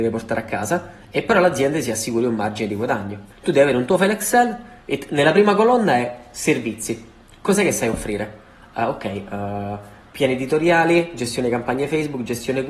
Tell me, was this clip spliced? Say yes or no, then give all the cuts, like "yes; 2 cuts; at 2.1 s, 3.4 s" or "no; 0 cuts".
yes; 1 cut; at 3.3 s